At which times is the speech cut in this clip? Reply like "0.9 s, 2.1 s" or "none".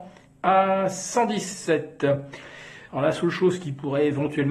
2.9 s

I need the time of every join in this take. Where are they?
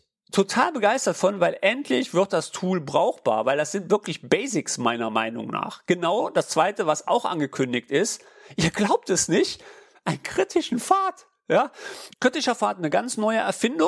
12.1 s

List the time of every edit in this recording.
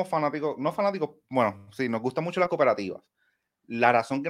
none

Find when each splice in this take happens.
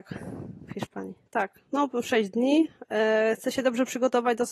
1.3 s

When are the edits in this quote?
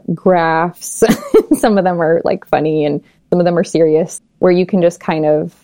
4.2 s

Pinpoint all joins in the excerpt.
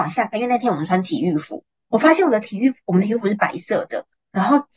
none

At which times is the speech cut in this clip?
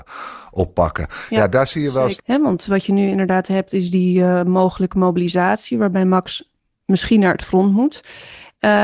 2.2 s

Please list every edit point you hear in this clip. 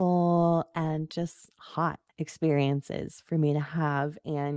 2.1 s

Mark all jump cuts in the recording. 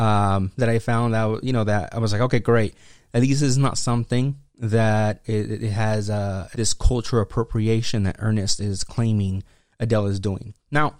5.2 s, 6.5 s, 8.6 s

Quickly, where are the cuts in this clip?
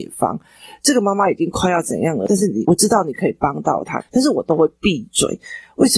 4.0 s

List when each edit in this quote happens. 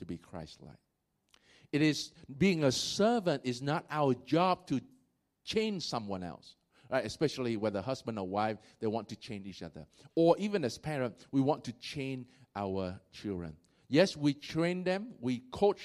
none

